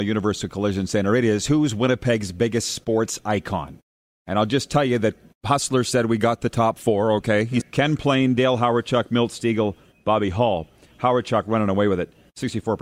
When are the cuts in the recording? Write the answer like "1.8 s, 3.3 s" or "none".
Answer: 7.6 s